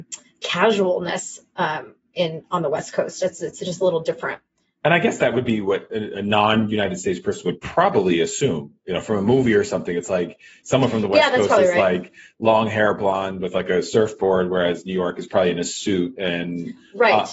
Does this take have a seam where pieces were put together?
no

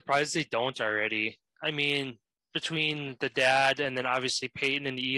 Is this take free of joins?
yes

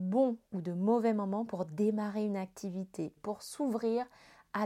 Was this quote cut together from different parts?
yes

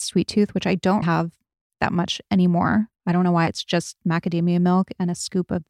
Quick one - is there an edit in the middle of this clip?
yes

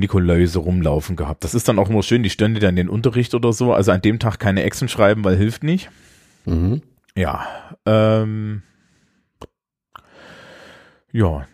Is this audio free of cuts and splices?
yes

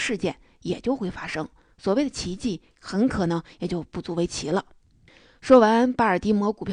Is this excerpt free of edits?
no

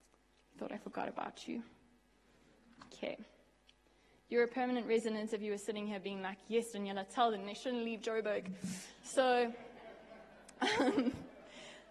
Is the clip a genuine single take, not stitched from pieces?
no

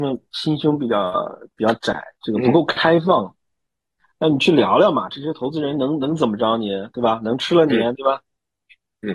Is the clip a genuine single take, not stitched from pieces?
no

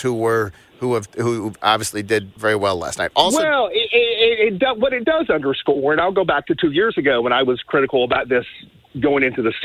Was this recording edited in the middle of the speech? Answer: yes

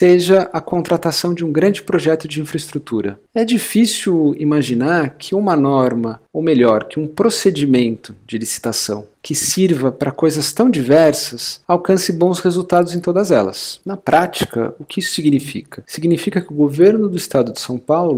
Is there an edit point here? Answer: yes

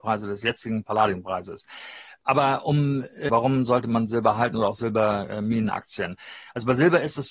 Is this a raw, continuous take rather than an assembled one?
no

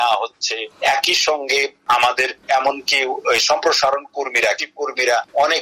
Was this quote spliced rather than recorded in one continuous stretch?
yes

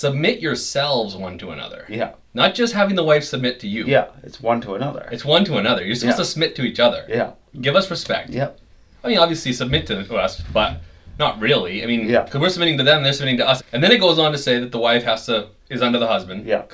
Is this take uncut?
no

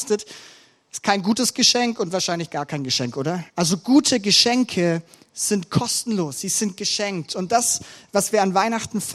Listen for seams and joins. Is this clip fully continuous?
no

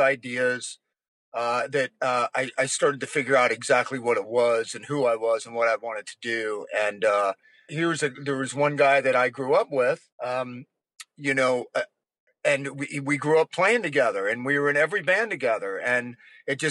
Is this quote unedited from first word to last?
no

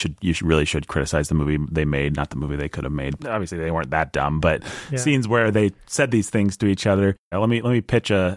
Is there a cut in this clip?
yes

